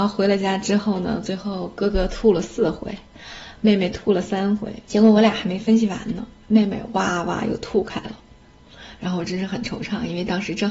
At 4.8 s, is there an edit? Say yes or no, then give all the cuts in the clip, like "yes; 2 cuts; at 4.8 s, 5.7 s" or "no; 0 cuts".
yes; 1 cut; at 4.8 s